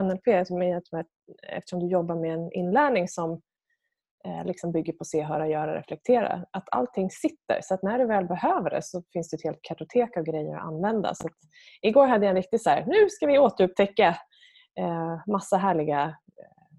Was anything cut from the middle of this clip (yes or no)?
no